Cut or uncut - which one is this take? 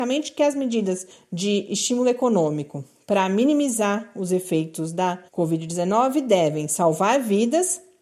cut